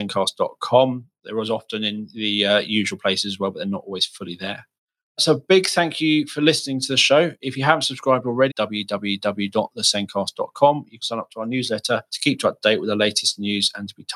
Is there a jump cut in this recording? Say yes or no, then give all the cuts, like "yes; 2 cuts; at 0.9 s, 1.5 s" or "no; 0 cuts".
yes; 2 cuts; at 8.5 s, 11.0 s